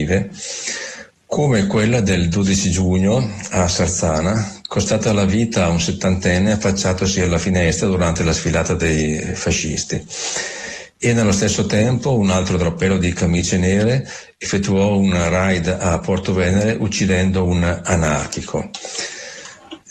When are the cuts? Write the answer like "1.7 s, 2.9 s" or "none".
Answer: none